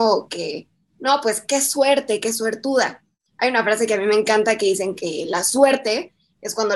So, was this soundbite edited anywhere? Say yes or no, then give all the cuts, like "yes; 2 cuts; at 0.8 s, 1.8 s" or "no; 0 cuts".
no; 0 cuts